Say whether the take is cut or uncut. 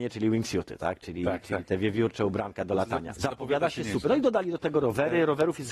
cut